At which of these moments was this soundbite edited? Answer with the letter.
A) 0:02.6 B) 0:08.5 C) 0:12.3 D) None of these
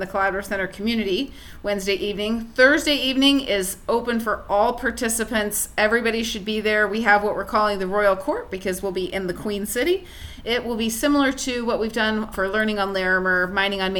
C